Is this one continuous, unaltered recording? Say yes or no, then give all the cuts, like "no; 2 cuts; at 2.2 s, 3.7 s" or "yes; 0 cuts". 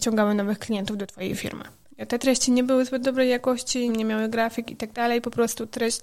no; 2 cuts; at 1.9 s, 3.9 s